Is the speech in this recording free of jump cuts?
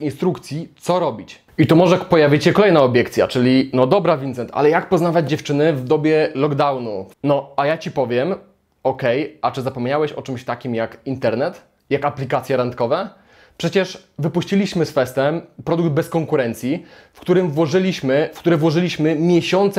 no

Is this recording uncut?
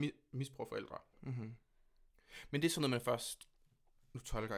no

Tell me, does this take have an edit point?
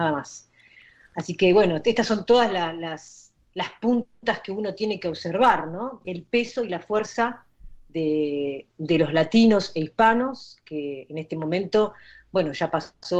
yes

